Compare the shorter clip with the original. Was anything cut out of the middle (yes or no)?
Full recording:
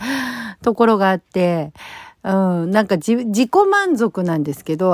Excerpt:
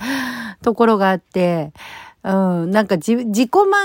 no